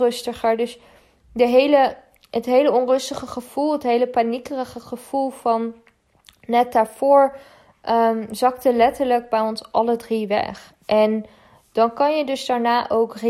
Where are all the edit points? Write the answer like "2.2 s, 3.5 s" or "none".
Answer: none